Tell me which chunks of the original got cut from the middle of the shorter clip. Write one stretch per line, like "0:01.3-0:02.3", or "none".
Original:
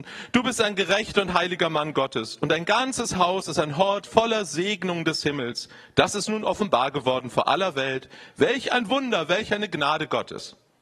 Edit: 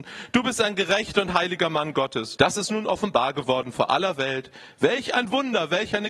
0:02.4-0:05.9